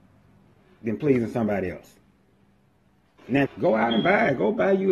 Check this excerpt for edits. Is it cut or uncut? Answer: cut